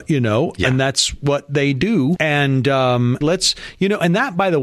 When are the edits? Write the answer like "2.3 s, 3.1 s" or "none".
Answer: 2.2 s, 3.2 s